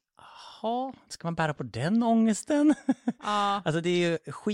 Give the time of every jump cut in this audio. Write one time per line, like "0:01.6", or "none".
none